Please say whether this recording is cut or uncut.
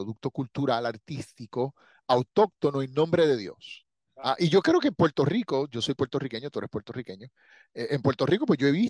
cut